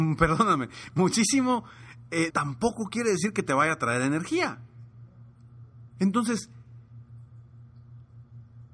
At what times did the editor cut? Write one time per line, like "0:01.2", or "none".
0:02.3
0:06.0